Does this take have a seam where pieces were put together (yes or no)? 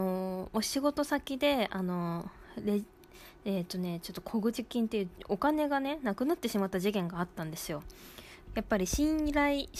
yes